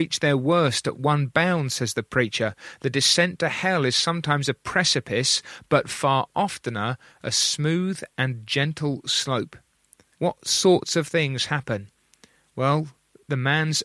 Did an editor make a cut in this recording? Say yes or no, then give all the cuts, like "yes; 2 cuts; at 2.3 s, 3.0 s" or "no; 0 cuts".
yes; 1 cut; at 10.1 s